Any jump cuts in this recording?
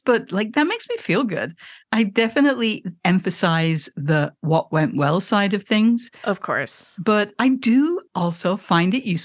no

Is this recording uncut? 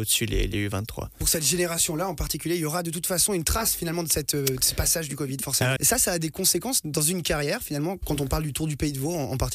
no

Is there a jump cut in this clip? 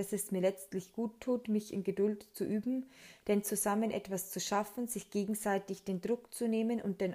no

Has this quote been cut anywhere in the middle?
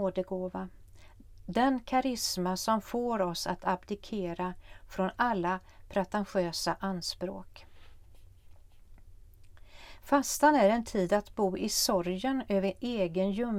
no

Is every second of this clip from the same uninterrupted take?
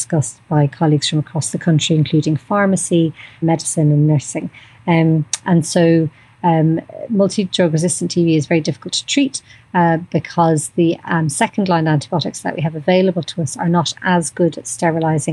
no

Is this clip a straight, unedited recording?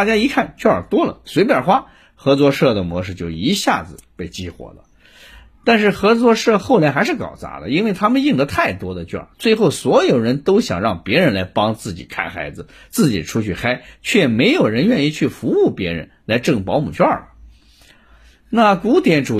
yes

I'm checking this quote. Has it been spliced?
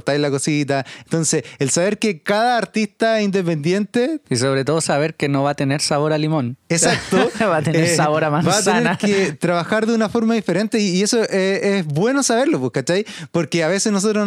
no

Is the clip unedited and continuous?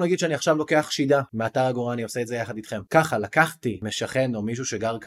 no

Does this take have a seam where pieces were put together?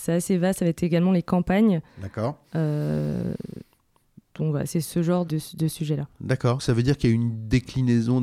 yes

